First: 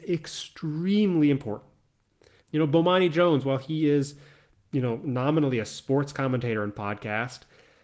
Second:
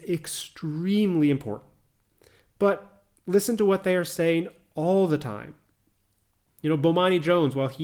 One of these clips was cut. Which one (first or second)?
first